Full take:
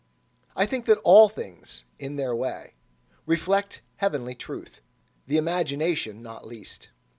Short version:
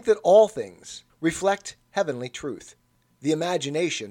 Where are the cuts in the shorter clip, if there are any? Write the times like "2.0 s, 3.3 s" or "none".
1.1 s